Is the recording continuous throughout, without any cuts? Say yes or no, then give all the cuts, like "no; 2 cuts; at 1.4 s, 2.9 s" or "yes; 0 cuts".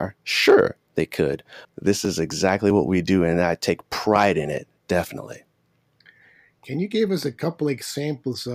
no; 1 cut; at 1.6 s